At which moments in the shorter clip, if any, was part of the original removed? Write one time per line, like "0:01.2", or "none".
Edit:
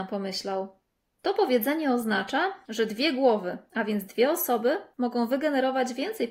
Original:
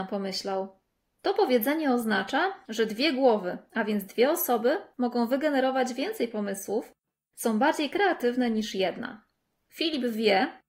none